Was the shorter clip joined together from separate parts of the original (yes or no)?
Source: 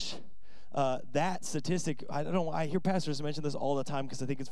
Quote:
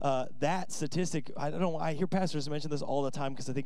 no